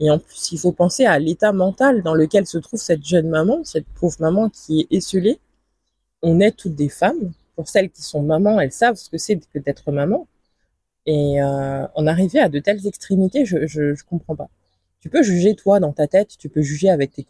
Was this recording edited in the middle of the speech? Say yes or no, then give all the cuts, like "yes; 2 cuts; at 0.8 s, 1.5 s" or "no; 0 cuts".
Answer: yes; 1 cut; at 6.1 s